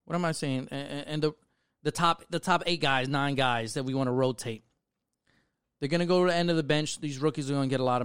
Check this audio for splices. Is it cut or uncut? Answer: uncut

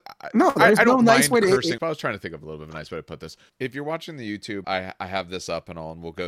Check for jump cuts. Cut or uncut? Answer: cut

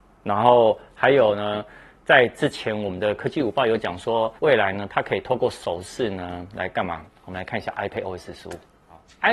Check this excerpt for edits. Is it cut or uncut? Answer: cut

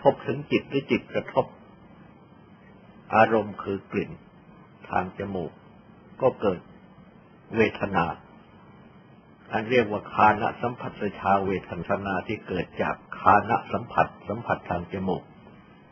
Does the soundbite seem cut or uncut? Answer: uncut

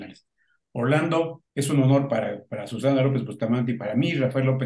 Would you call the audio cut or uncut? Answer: cut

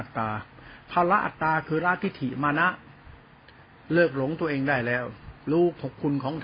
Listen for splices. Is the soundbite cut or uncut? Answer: cut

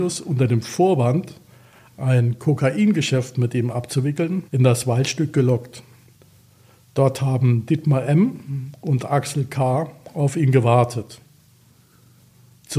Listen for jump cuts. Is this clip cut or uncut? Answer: cut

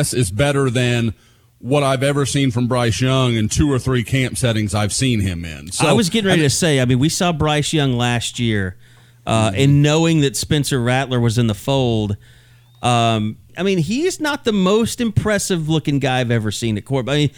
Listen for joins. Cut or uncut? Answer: cut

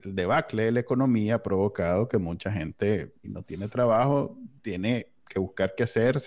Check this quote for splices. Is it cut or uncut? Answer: cut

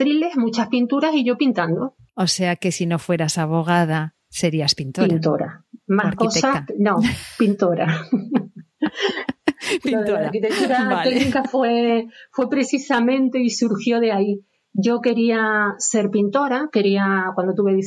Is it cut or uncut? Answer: uncut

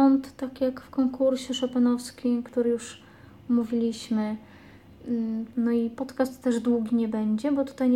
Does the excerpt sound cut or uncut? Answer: cut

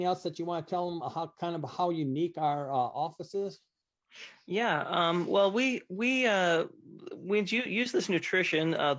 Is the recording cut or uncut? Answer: uncut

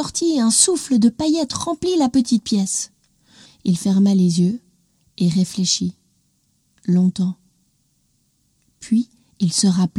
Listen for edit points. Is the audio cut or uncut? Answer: cut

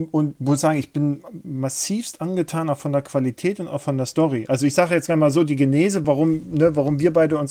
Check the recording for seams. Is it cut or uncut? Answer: uncut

